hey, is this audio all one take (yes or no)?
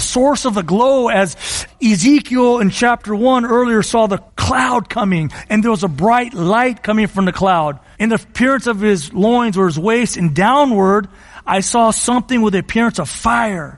no